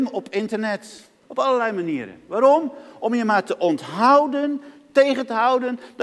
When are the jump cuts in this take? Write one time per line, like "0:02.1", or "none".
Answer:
0:01.2